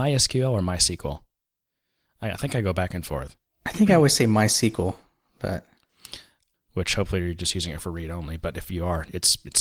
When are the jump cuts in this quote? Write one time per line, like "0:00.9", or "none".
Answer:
0:06.5